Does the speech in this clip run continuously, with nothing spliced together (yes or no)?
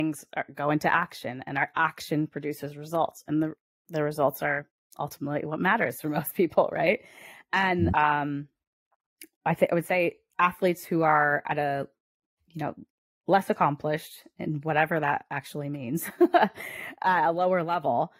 no